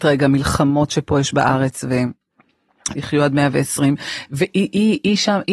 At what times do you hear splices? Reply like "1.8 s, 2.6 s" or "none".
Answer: 2.9 s